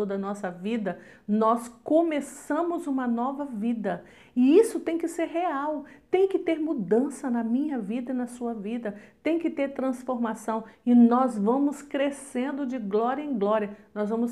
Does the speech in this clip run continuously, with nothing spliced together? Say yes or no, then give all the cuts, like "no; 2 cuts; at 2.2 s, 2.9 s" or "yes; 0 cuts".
yes; 0 cuts